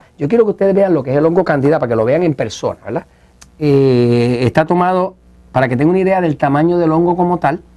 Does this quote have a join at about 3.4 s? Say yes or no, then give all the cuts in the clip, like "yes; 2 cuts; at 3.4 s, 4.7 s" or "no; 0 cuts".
yes; 1 cut; at 3.4 s